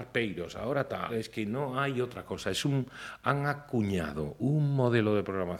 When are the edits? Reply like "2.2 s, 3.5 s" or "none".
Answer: 1.1 s